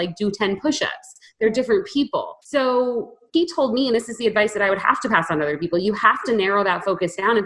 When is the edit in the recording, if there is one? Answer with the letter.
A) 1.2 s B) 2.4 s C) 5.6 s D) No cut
B